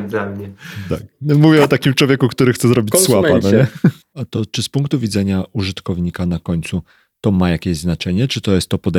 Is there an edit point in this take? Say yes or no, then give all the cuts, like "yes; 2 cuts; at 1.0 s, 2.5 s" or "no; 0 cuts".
yes; 1 cut; at 4.0 s